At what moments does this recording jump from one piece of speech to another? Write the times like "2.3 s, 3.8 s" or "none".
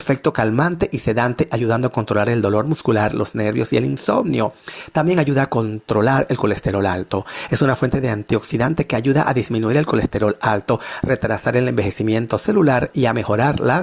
none